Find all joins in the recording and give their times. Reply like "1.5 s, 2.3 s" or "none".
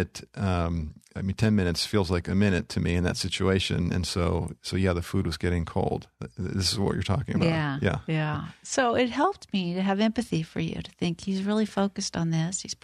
none